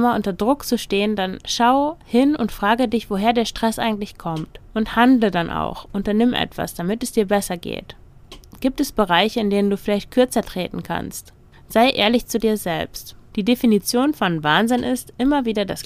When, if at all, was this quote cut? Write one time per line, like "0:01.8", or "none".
0:04.7
0:11.5
0:13.3